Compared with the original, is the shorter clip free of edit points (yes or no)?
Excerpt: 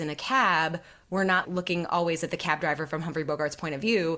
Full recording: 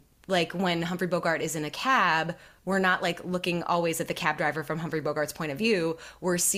no